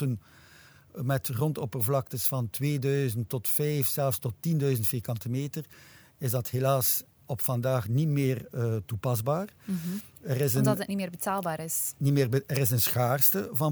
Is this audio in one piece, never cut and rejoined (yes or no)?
yes